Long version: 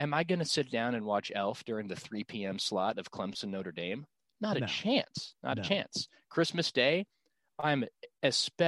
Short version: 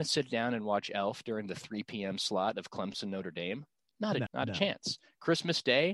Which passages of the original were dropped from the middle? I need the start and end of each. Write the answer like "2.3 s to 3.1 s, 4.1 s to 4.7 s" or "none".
4.7 s to 5.4 s